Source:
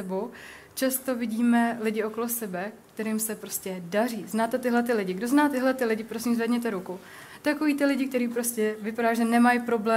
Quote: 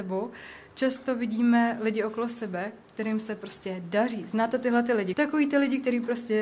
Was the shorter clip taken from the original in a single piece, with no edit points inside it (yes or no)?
no